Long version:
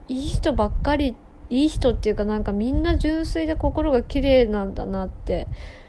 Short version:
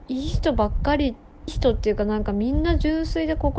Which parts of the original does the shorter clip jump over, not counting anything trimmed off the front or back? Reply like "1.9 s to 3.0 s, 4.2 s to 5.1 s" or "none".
1.5 s to 1.7 s